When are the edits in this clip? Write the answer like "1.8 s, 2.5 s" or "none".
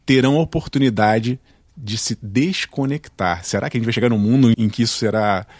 4.5 s